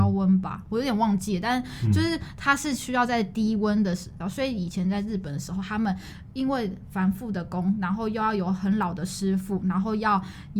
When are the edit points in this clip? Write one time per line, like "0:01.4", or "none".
0:04.2